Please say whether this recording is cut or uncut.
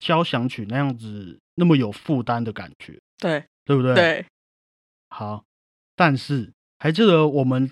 cut